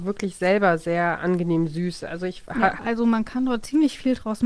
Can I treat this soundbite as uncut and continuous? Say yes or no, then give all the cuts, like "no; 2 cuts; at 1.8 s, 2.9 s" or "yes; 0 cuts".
no; 1 cut; at 2.8 s